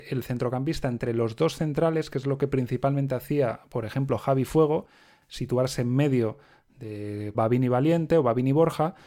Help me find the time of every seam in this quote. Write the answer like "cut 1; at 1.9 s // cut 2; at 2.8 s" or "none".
cut 1; at 7.3 s